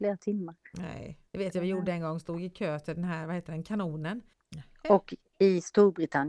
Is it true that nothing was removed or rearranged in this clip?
no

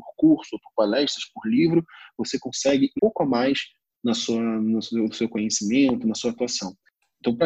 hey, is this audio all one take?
no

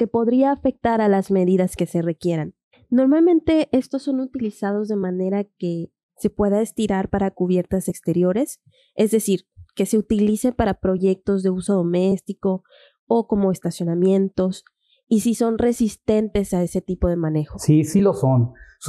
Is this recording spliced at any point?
no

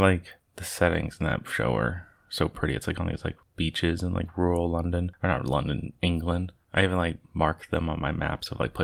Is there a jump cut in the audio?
no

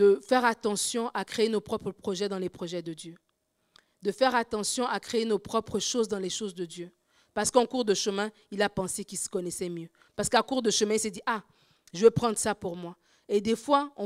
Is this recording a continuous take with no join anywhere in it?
no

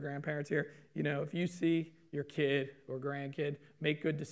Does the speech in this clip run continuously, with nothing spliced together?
yes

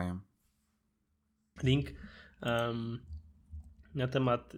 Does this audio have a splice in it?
yes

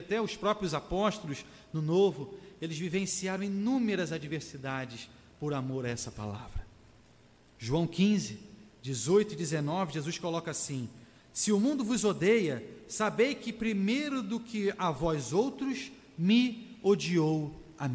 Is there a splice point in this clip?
no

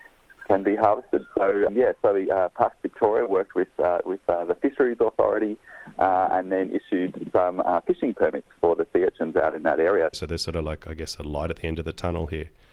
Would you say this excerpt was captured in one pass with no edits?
no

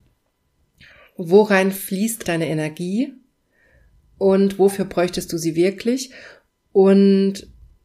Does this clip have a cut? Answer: yes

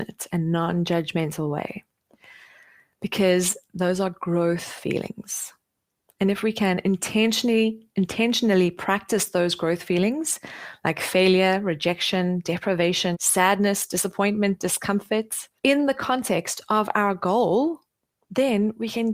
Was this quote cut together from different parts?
yes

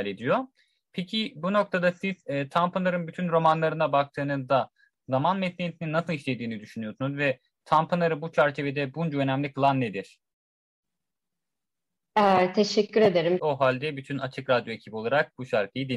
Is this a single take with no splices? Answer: no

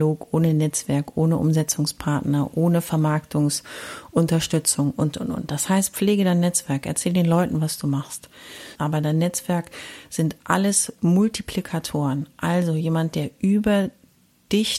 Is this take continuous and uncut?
no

